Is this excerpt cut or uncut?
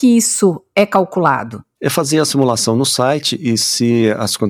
cut